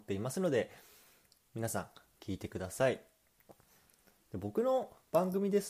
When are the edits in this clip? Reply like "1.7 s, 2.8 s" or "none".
none